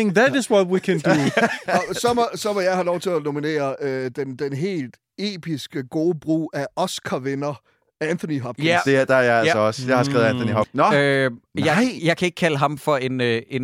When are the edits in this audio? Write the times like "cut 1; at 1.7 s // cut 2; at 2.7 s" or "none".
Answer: cut 1; at 10.6 s